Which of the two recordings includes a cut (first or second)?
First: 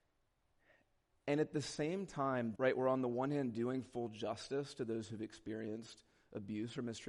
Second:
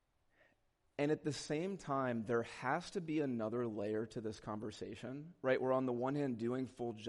first